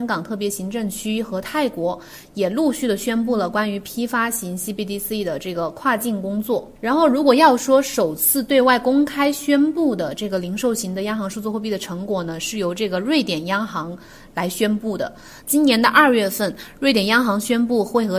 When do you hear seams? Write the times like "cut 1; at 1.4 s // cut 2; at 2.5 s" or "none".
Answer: cut 1; at 6.8 s // cut 2; at 15.4 s